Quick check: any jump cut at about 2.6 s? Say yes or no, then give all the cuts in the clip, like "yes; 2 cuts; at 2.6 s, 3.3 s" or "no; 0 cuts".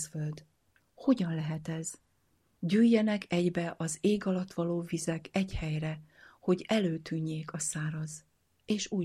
yes; 1 cut; at 2.6 s